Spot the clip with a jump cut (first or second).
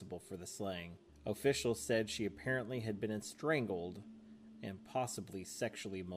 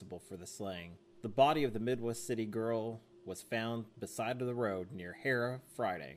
first